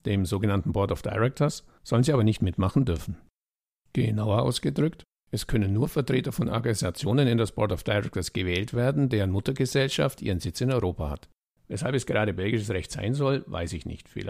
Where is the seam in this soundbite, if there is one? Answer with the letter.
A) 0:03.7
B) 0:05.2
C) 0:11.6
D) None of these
C